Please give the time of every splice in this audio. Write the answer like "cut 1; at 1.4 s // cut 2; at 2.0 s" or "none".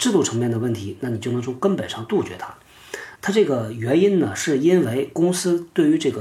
cut 1; at 3.2 s